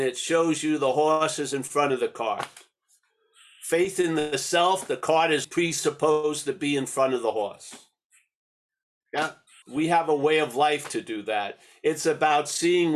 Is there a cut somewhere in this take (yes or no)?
yes